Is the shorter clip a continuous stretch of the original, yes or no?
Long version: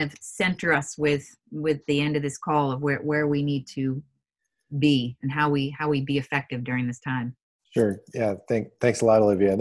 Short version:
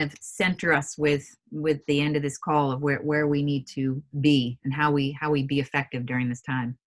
no